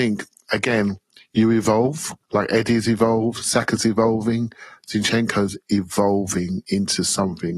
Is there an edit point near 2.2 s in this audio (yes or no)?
yes